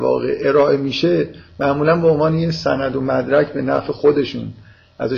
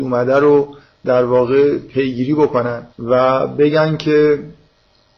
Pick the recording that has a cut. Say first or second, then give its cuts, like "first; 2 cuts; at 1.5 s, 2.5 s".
second; 1 cut; at 2.9 s